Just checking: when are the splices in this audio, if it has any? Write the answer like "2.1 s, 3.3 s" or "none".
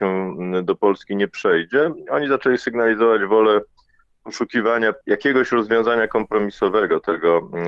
5.0 s